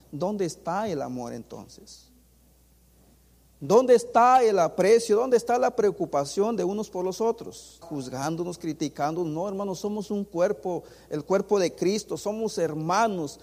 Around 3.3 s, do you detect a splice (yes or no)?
no